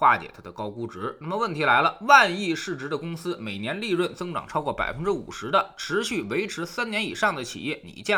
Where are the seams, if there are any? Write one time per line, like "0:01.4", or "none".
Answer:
none